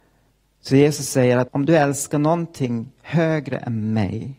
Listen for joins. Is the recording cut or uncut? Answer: cut